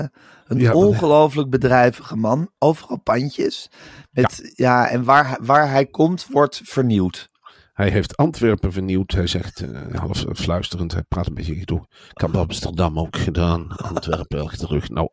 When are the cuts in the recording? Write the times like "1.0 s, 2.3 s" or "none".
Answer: none